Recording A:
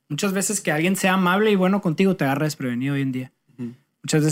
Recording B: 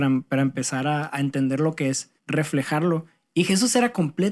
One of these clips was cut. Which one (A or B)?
B